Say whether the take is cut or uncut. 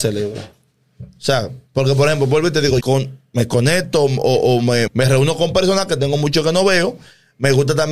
cut